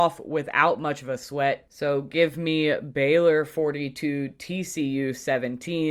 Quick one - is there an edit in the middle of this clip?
no; 0 cuts

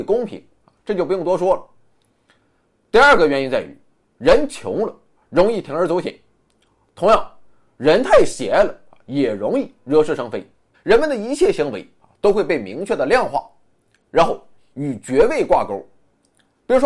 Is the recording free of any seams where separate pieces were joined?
no; 1 cut; at 10.7 s

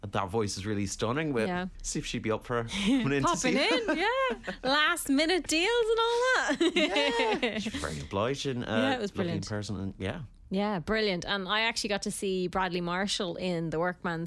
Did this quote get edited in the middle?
yes; 1 cut; at 1.7 s

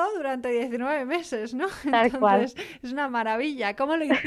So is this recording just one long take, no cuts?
yes; 0 cuts

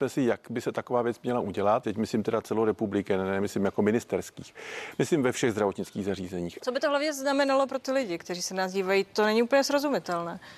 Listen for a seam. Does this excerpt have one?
yes; 2 cuts; at 1.8 s, 6.6 s

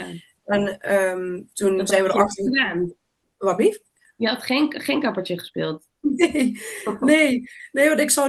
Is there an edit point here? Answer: no; 0 cuts

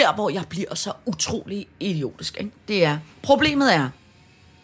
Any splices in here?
yes; 1 cut; at 3.1 s

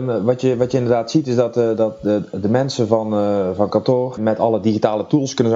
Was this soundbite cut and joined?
yes; 1 cut; at 4.2 s

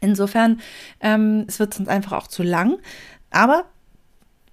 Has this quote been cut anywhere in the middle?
yes; 1 cut; at 1.5 s

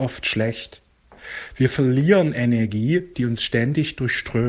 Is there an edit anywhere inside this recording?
yes; 2 cuts; at 1.5 s, 3.1 s

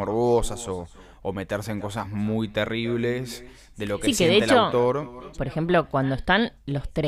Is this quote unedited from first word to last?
no; 1 cut; at 5.3 s

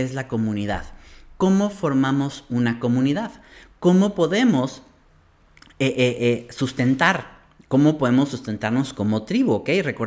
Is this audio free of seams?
yes; 0 cuts

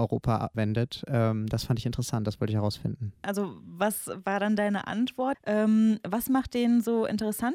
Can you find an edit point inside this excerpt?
yes; 2 cuts; at 3.2 s, 5.3 s

